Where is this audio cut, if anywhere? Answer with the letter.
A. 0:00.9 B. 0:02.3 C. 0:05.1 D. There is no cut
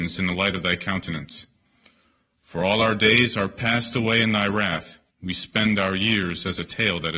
C